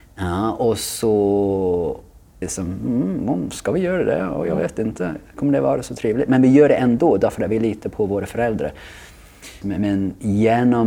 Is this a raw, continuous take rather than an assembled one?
no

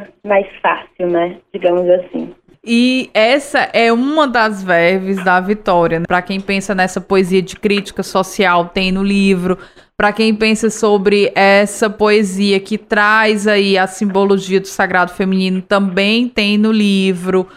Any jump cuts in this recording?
yes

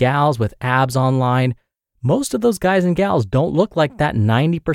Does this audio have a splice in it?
no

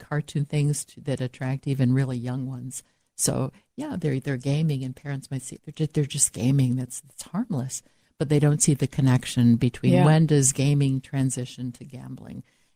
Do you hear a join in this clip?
yes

